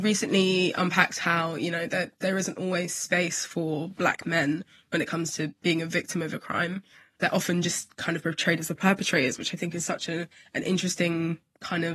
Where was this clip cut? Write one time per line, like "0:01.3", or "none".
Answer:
none